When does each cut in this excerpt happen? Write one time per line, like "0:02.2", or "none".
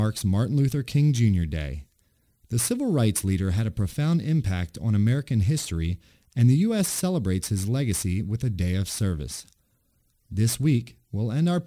none